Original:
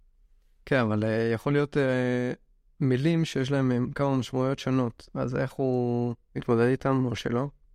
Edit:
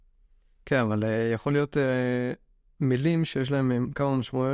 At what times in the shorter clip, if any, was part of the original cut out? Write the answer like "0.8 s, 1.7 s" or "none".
none

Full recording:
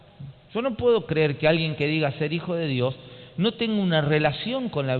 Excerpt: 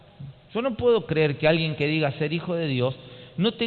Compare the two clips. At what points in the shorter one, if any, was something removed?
none

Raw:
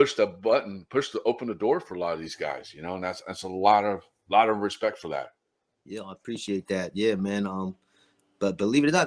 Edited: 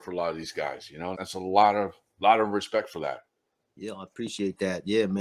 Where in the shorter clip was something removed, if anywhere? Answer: 1.1 s

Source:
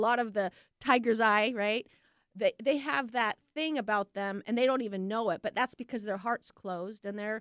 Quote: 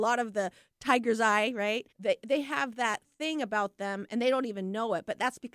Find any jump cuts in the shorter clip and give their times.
1.9 s

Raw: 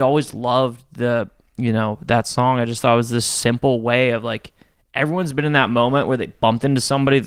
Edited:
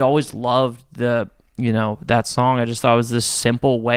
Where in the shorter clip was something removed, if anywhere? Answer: none

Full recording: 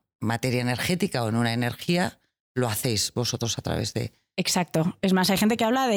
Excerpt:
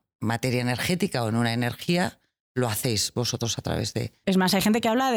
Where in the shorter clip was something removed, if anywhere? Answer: 4.2 s

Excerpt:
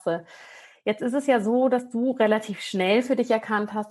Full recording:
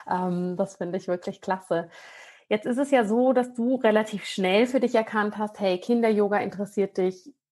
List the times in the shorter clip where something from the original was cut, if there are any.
none

